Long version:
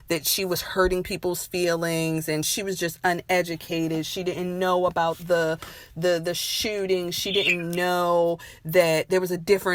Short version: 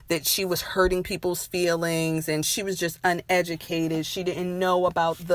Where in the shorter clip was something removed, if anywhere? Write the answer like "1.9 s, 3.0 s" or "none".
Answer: none